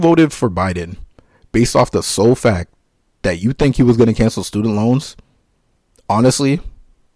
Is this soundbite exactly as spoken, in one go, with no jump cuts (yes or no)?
yes